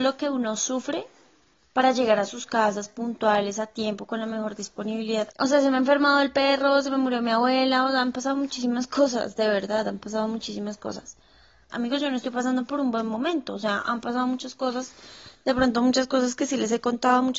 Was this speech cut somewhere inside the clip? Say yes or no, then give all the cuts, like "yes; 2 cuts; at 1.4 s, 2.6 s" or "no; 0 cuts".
yes; 2 cuts; at 5.3 s, 11.7 s